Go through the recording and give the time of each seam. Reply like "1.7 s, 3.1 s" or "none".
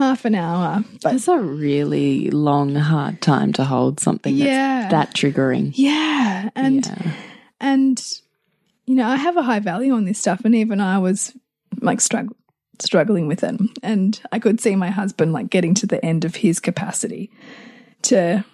none